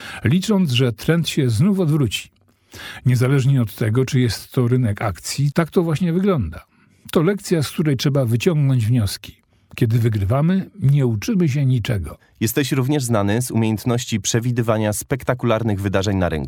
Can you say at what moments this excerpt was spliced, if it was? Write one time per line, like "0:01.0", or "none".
0:05.5

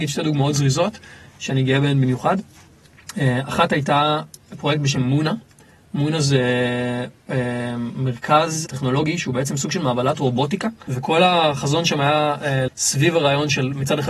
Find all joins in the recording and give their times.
0:08.7
0:10.9
0:12.7

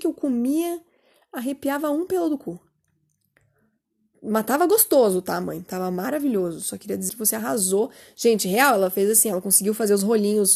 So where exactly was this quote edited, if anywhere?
0:07.1

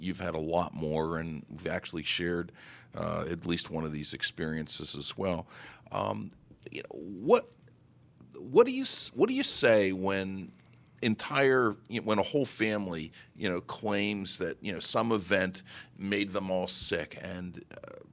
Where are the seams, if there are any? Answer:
none

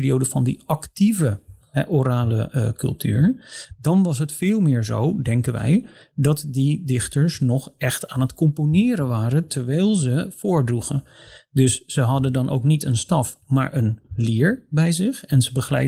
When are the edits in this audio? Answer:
none

